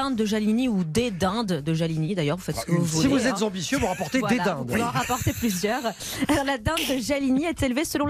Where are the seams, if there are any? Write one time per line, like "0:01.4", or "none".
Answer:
none